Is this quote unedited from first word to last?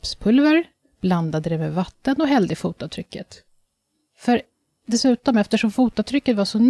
yes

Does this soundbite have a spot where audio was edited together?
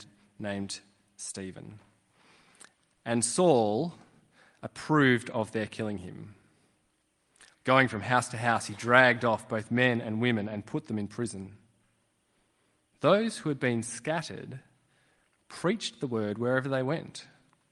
yes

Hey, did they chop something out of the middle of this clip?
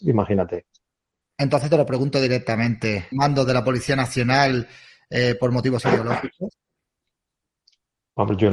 yes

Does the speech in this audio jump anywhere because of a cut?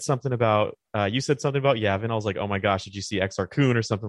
no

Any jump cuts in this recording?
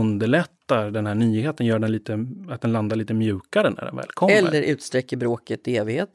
no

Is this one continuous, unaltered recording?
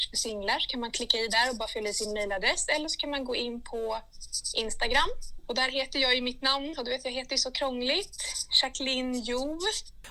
yes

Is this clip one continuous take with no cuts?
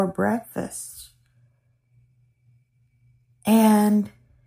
yes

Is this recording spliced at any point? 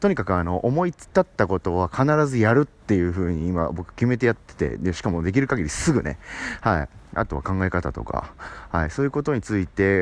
yes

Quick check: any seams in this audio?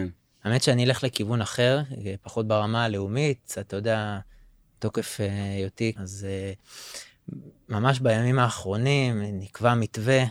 yes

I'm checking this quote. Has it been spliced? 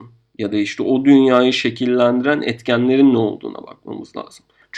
no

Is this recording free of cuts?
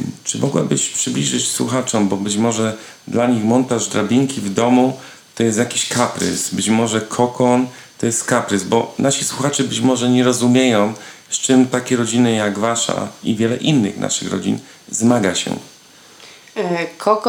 yes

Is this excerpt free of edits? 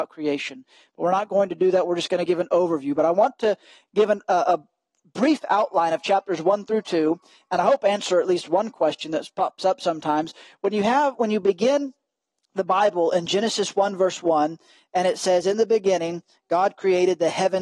yes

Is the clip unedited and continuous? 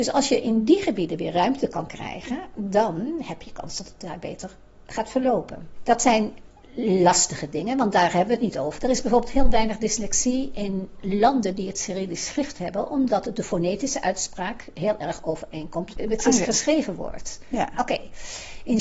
no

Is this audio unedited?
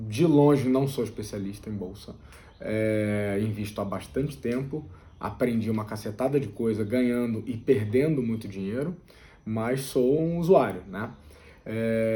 yes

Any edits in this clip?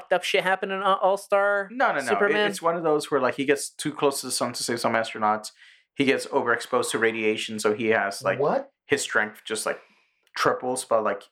no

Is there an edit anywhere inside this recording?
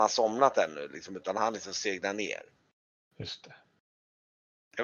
no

